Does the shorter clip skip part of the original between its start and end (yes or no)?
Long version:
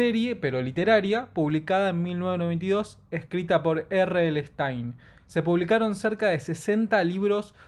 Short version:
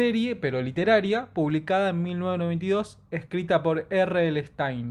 no